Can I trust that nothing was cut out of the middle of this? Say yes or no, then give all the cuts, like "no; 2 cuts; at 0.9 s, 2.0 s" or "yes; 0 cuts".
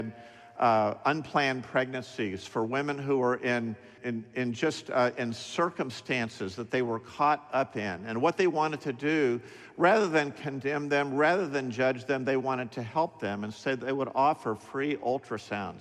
no; 1 cut; at 4.0 s